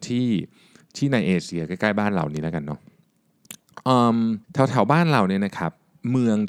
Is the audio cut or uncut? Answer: cut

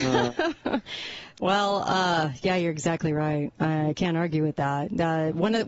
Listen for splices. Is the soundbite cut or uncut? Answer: uncut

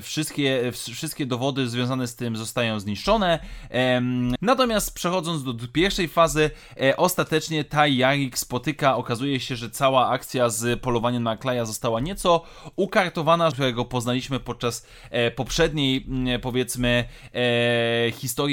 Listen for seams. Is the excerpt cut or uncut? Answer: cut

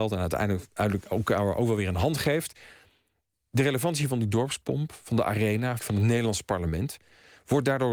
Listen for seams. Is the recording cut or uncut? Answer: cut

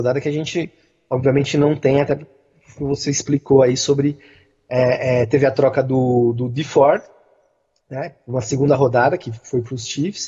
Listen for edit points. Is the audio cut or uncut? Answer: uncut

